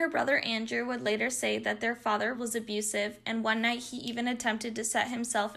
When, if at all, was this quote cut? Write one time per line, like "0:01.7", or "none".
0:02.3